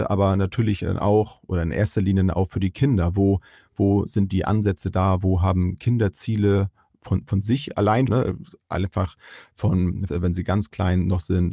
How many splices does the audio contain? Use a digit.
2